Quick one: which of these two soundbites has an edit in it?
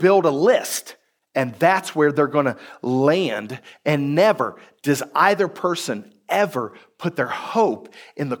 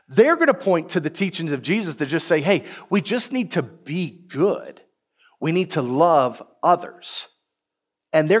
first; 1 cut; at 1.2 s

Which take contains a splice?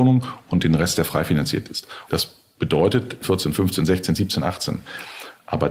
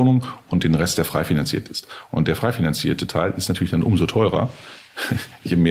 first; 2 cuts; at 2.1 s, 3.2 s

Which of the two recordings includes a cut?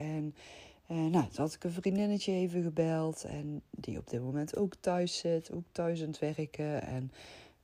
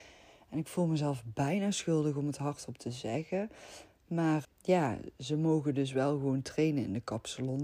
second; 1 cut; at 4.4 s

